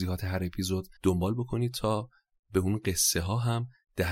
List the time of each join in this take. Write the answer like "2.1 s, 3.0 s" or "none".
1.0 s